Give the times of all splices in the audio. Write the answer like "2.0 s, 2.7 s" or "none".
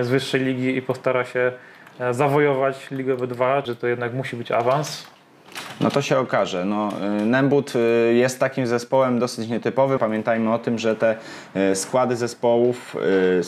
3.6 s, 10.0 s